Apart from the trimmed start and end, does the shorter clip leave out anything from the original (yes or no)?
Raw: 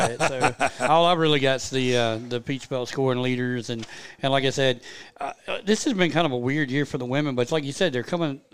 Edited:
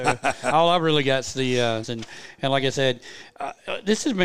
yes